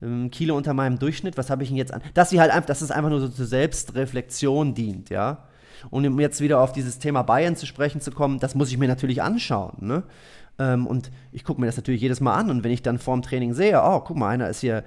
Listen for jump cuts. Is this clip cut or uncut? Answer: uncut